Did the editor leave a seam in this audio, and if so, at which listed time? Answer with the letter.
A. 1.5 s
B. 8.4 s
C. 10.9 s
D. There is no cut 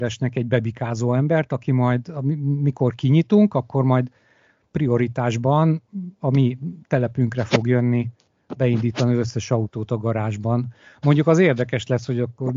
D